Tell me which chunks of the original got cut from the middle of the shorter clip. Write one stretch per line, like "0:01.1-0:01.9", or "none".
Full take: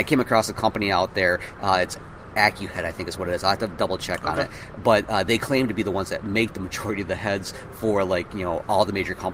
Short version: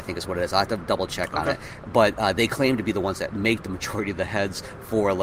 none